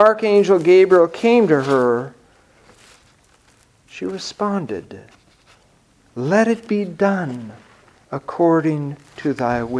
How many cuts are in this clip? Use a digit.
0